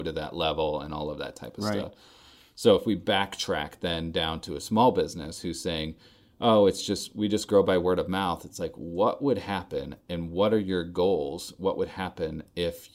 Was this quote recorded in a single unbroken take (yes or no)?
yes